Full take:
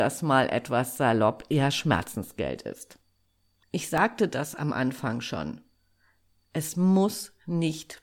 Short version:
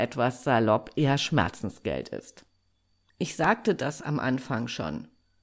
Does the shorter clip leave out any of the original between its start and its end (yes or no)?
no